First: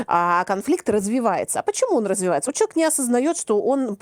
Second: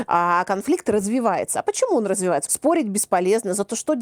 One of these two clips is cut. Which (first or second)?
second